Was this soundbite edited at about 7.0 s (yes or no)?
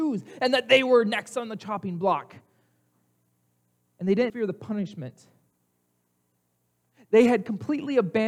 no